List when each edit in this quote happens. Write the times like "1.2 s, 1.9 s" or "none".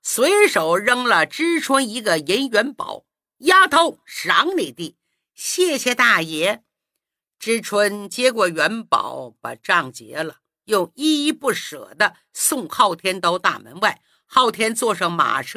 none

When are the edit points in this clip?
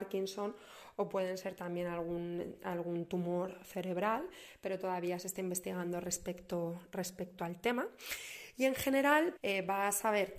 9.4 s

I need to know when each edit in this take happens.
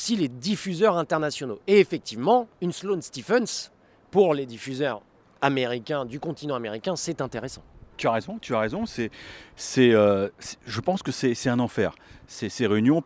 2.5 s

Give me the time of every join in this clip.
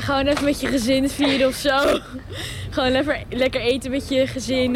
none

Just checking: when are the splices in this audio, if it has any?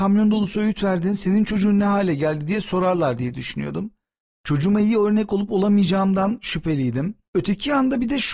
7.3 s

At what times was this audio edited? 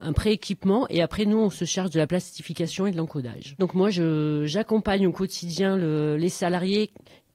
3.6 s

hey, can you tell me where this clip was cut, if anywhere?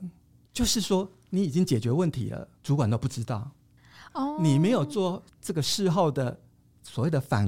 2.6 s

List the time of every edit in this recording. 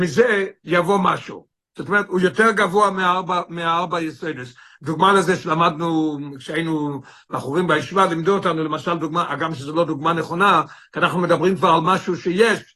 none

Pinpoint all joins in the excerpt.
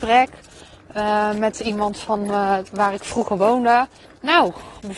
4.0 s

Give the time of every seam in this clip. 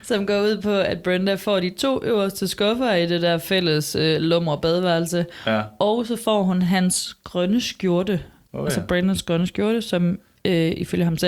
none

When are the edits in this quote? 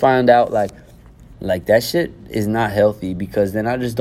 1.3 s

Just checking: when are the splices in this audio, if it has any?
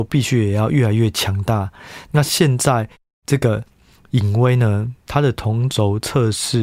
2.1 s

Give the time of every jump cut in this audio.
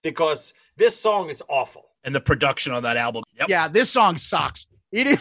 2.0 s, 3.2 s

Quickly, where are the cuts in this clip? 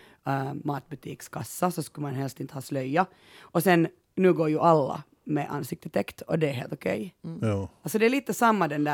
none

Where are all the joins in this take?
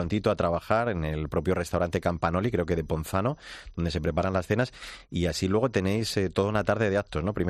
none

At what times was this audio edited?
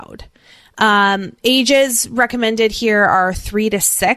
none

